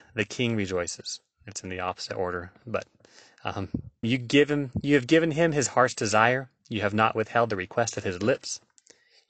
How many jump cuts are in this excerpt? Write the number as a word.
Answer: one